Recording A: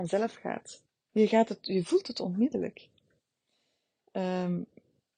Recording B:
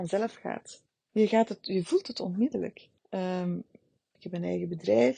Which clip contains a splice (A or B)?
B